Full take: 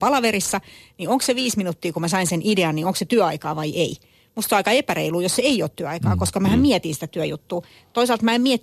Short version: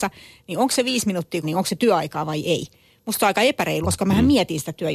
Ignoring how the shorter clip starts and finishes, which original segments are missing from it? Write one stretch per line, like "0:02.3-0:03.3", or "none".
0:01.9-0:02.7
0:05.1-0:06.2

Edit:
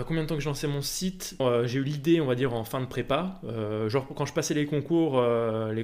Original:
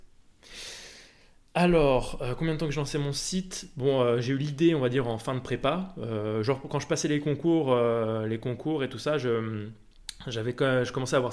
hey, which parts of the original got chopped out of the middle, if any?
0:03.7-0:03.9

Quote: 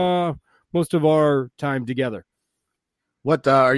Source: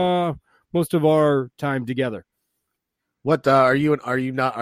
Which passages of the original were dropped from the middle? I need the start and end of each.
none

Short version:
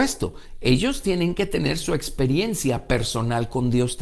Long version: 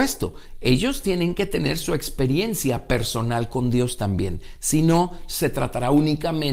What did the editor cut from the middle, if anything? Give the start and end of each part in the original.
none

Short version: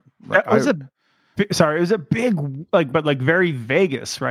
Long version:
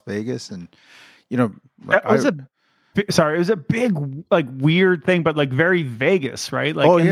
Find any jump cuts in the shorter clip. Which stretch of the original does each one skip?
0:04.5-0:05.2

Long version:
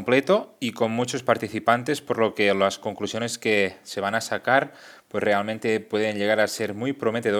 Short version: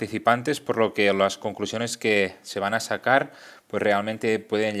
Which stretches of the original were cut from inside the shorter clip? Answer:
none

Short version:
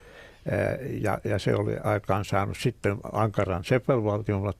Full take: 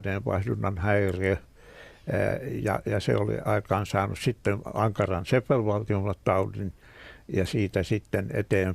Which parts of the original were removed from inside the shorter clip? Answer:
none

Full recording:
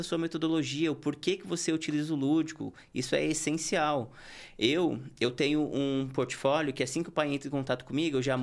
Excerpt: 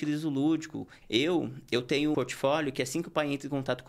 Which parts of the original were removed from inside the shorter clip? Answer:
0:02.9-0:04.5
0:05.6-0:06.2

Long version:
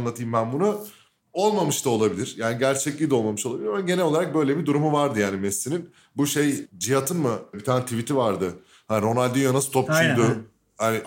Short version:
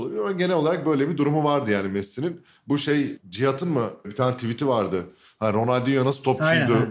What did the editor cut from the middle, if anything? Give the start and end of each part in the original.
none

